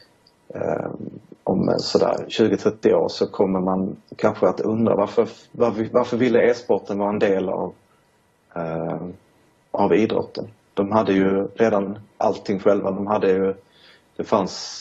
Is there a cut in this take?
no; 0 cuts

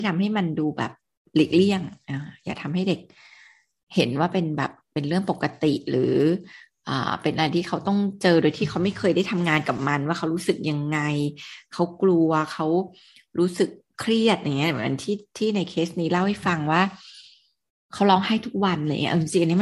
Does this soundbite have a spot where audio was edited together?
no; 0 cuts

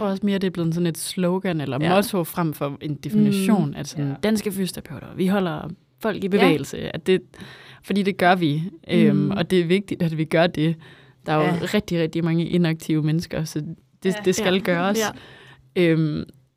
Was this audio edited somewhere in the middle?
no; 0 cuts

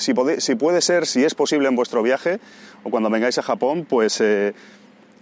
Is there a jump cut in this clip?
no; 0 cuts

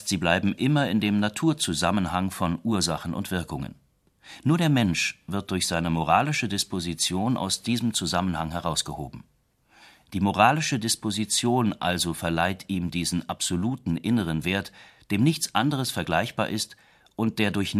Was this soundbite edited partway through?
yes; 1 cut; at 10.0 s

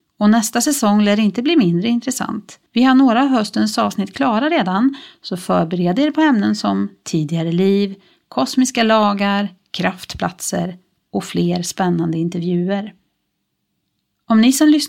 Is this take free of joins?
no; 1 cut; at 2.7 s

